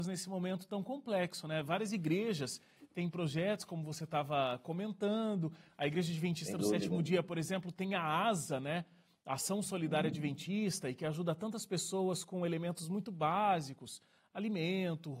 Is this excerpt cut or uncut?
uncut